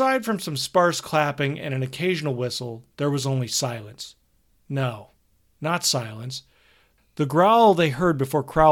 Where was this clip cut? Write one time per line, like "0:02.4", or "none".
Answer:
none